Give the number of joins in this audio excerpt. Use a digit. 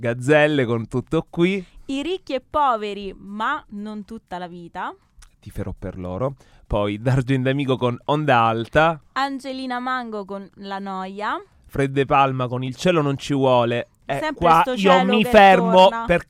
0